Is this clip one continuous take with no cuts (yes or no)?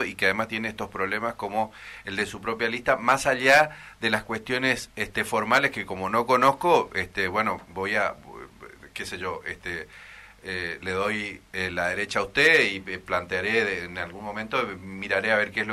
yes